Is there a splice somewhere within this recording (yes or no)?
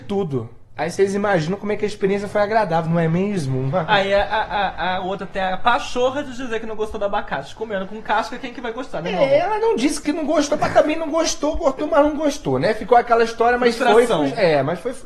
no